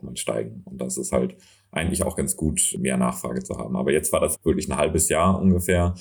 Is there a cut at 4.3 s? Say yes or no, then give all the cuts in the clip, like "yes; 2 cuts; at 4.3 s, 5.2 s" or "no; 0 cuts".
yes; 1 cut; at 4.3 s